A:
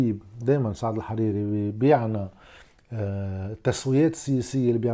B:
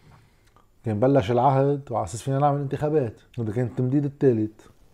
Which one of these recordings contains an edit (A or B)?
B